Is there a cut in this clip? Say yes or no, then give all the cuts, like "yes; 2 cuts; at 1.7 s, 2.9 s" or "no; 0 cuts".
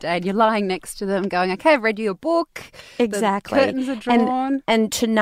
no; 0 cuts